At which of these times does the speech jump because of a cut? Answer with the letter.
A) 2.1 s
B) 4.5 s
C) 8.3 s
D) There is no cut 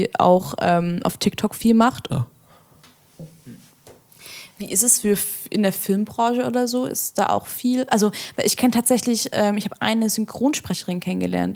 A